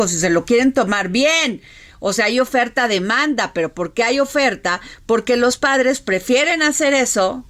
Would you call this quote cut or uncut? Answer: uncut